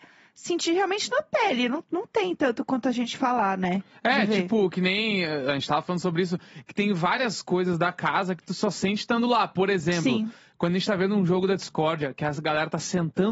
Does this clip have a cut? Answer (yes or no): no